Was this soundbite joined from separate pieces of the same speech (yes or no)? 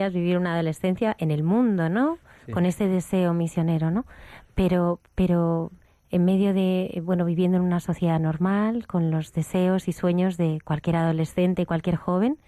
no